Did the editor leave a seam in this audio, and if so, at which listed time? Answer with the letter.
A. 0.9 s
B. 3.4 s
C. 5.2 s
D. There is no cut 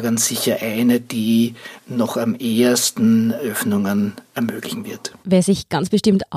C